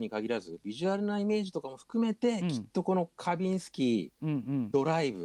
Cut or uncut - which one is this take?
uncut